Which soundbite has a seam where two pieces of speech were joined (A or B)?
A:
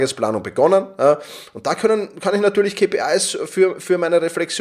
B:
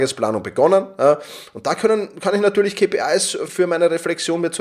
B